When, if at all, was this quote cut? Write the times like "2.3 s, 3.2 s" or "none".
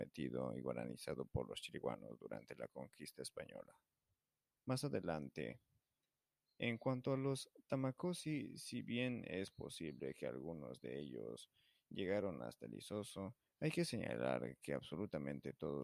4.6 s